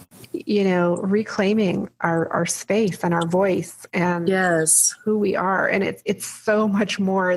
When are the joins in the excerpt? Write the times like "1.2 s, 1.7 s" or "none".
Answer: none